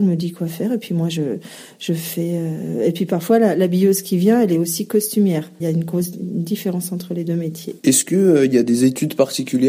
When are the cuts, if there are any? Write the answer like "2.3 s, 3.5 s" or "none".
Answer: 5.6 s